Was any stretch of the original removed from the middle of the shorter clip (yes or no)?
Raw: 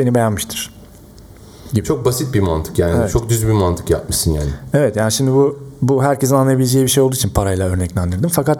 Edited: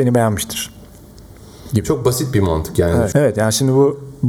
yes